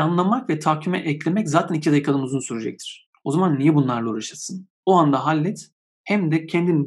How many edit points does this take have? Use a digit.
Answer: 0